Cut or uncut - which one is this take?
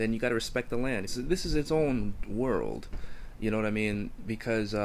cut